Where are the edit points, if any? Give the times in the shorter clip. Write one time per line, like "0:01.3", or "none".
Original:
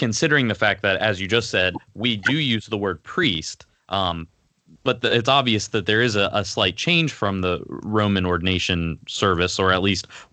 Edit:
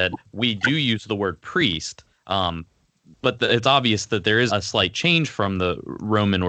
0:04.5